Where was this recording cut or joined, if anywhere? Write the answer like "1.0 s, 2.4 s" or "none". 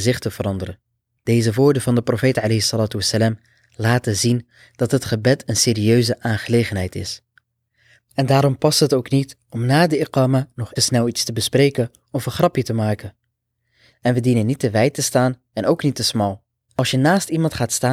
10.8 s, 13.9 s, 16.6 s